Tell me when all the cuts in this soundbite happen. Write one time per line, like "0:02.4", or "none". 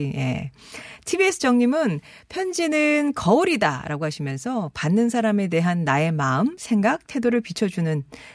none